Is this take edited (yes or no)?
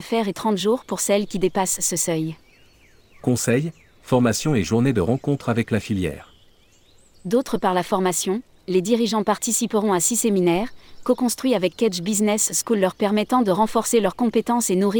no